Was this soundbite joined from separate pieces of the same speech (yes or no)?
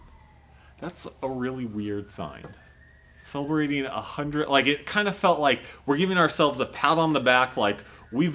no